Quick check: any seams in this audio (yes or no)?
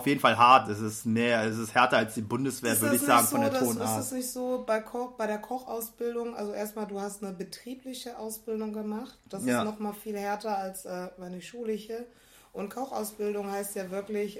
no